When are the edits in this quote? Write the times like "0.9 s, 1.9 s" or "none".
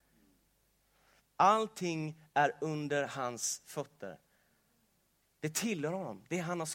1.2 s